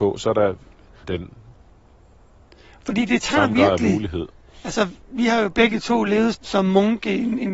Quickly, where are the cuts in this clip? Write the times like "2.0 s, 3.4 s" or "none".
1.0 s, 6.3 s